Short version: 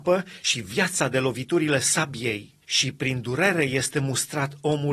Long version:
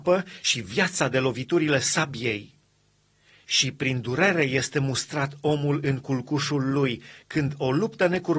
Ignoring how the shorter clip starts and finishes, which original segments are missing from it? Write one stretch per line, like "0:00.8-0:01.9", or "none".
0:02.6-0:03.4